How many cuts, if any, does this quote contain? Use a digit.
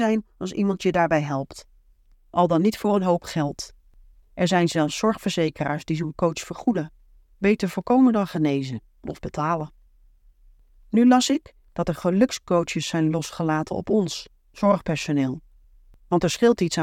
0